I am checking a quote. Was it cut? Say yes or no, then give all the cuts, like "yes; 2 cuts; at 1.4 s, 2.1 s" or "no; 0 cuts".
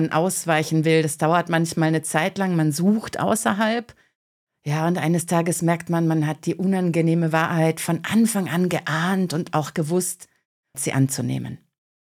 yes; 1 cut; at 10.7 s